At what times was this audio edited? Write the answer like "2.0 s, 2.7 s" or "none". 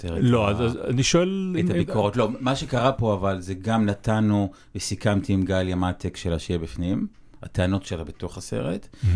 none